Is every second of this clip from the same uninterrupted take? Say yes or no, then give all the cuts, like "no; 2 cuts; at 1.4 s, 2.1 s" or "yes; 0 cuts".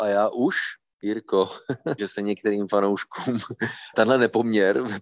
no; 2 cuts; at 2.0 s, 3.9 s